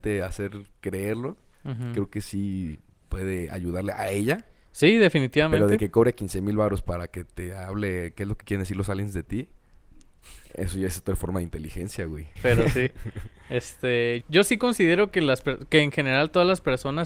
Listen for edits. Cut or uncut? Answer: cut